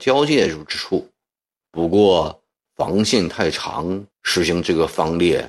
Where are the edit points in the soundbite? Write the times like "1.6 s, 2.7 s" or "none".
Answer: 1.7 s, 4.1 s